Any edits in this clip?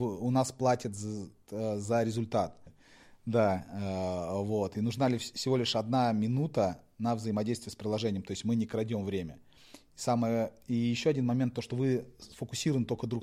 yes; 1 cut; at 2.7 s

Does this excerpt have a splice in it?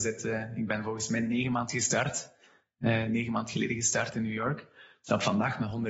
no; 0 cuts

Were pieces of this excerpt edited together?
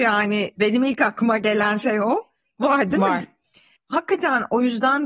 yes; 1 cut; at 3.8 s

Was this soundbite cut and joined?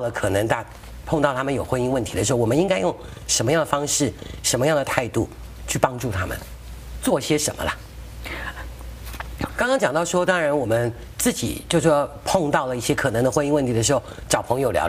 yes; 1 cut; at 9.5 s

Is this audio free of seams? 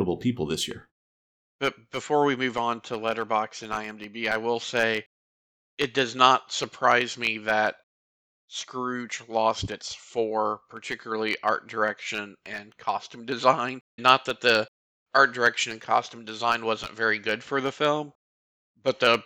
no; 2 cuts; at 1.4 s, 14.0 s

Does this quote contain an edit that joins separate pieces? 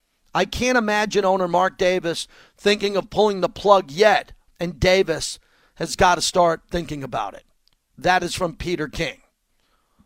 yes; 1 cut; at 4.5 s

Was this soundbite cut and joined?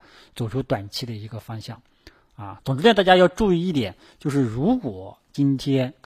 yes; 1 cut; at 2.6 s

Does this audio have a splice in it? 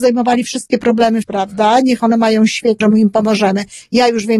yes; 2 cuts; at 1.2 s, 2.8 s

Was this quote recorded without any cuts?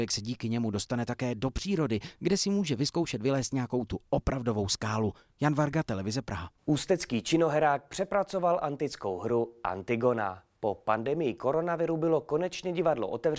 yes; 0 cuts

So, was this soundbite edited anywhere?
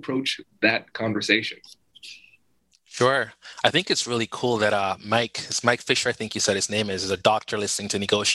no; 0 cuts

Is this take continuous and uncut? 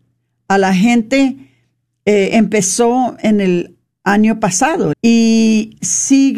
no; 1 cut; at 4.9 s

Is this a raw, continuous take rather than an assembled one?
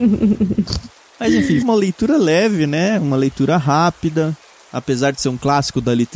no; 1 cut; at 1.6 s

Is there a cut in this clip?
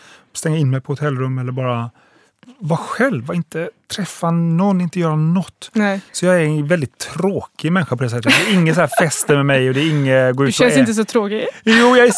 no; 0 cuts

